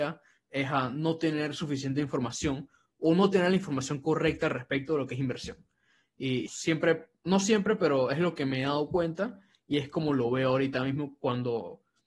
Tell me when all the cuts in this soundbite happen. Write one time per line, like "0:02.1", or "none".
0:06.5